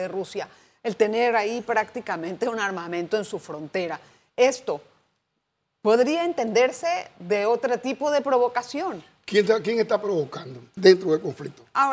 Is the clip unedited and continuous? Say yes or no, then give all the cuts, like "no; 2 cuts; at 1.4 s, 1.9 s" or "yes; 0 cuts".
no; 1 cut; at 10.8 s